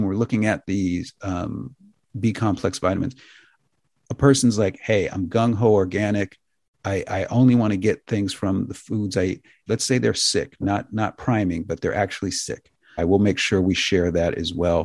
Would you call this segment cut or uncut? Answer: cut